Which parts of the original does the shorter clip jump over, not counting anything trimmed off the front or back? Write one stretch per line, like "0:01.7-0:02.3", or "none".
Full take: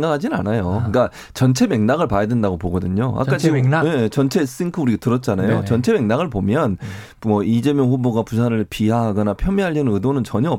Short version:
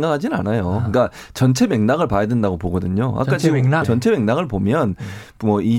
0:03.8-0:05.6